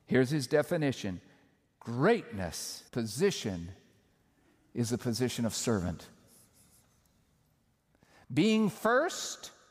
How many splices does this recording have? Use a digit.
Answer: 1